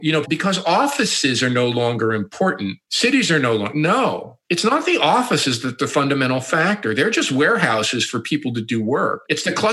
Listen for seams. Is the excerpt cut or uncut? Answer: uncut